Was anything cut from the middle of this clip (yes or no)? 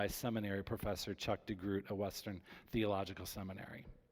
no